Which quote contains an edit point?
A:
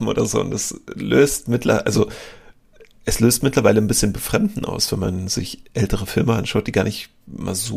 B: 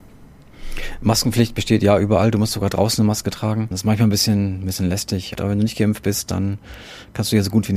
B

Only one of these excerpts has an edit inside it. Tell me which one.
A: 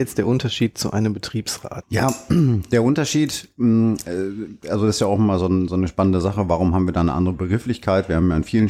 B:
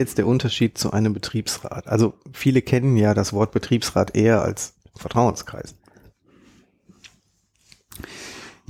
A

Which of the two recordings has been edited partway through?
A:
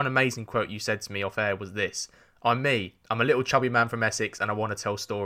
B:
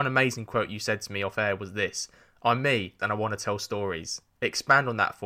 B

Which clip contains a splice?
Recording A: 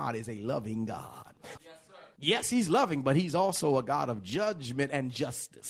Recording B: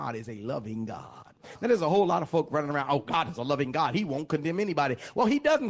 A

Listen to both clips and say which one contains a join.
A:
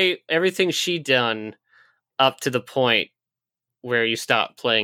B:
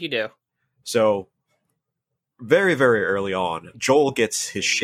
B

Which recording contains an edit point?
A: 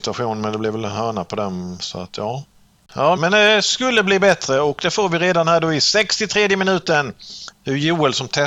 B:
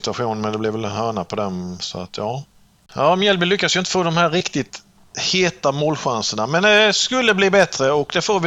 A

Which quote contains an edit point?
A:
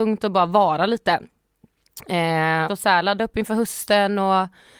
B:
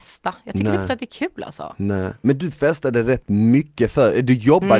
A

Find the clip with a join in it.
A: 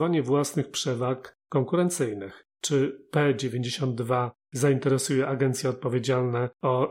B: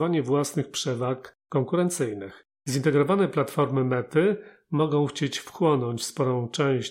B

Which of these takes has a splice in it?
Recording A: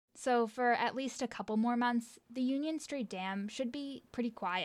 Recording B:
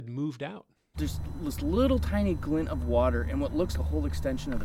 B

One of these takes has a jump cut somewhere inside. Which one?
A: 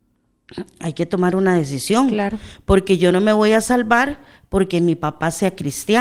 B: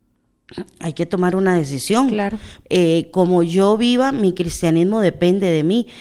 B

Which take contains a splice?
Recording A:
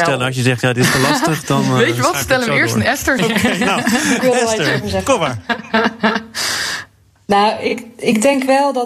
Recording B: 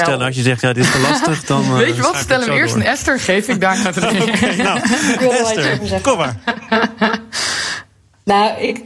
A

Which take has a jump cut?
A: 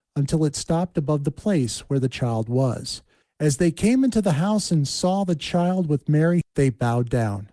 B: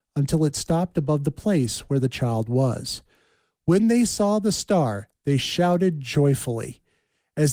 A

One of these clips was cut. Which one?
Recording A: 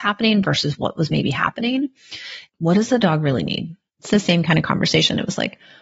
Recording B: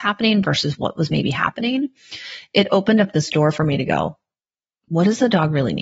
A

